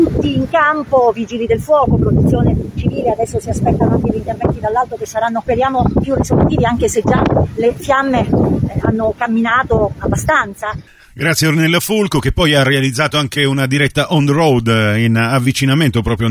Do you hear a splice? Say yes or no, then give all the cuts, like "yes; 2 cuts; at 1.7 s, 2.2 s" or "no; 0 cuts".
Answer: no; 0 cuts